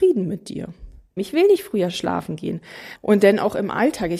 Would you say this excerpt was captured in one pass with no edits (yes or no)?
no